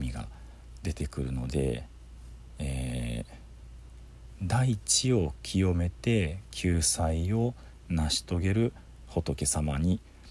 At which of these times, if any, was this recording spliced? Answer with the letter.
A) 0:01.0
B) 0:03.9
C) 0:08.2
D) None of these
D